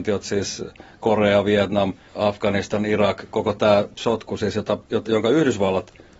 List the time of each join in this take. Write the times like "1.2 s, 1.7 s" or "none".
2.1 s, 5.0 s